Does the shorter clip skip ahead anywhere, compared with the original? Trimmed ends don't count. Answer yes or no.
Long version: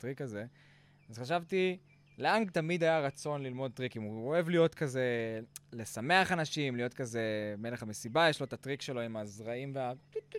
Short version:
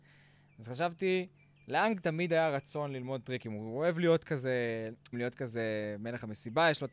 yes